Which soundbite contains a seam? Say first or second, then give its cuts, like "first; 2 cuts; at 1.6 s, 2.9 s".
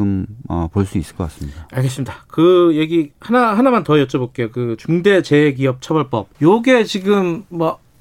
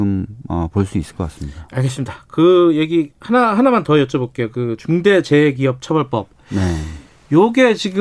first; 1 cut; at 6.3 s